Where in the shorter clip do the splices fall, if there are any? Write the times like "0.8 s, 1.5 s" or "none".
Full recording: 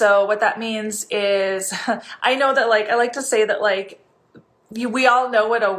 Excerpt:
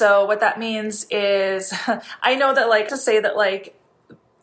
2.9 s